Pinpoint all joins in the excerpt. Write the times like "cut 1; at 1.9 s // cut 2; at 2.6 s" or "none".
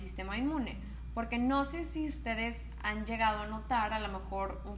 none